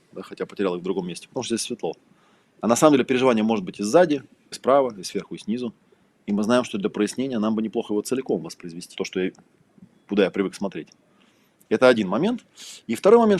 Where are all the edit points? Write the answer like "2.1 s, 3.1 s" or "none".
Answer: 4.5 s, 9.0 s